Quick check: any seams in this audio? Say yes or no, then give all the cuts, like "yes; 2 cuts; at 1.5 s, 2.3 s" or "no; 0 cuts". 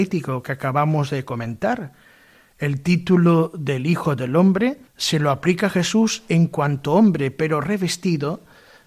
yes; 1 cut; at 4.9 s